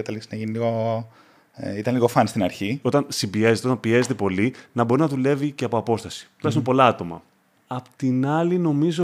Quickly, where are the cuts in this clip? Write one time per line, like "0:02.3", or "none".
0:02.8
0:07.5